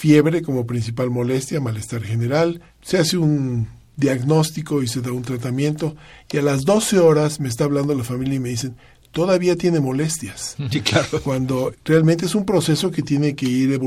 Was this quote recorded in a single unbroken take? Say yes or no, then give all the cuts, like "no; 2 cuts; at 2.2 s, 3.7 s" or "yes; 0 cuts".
yes; 0 cuts